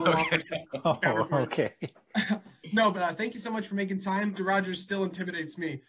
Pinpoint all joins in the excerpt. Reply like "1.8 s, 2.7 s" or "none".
2.9 s, 4.4 s